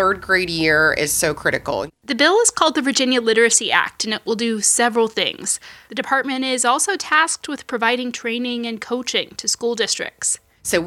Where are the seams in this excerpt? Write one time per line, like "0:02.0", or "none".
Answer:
0:01.9
0:05.9